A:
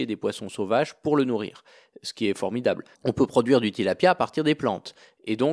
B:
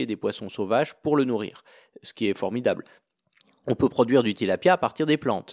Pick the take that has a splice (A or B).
A